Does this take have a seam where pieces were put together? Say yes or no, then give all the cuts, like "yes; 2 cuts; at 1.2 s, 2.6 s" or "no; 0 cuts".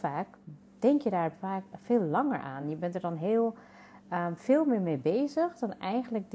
no; 0 cuts